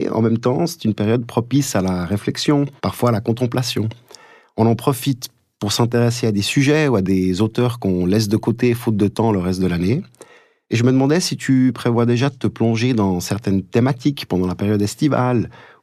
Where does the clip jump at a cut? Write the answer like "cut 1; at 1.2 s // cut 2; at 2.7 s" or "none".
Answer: cut 1; at 2.8 s